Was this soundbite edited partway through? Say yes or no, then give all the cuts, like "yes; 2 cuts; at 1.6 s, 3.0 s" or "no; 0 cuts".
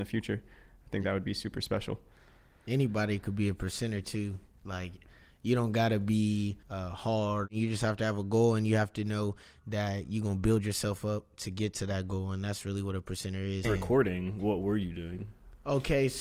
yes; 2 cuts; at 6.6 s, 13.6 s